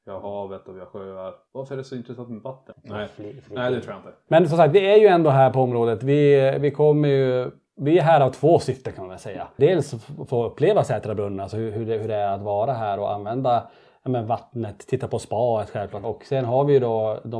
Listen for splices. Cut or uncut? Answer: cut